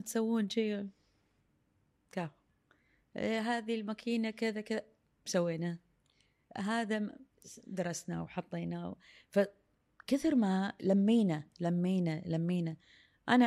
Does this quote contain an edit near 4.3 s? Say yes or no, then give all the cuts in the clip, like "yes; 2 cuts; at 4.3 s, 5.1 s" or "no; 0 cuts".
no; 0 cuts